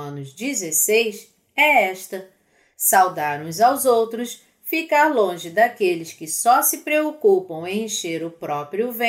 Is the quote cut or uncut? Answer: uncut